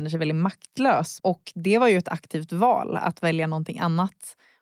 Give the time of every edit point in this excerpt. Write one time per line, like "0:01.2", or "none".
0:01.2